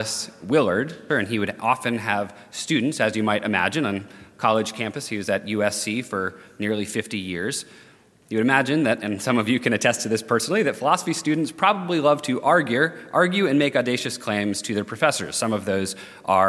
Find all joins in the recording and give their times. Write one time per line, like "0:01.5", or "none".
0:01.1